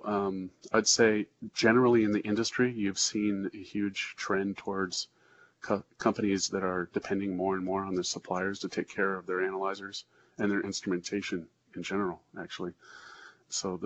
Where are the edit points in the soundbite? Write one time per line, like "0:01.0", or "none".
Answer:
none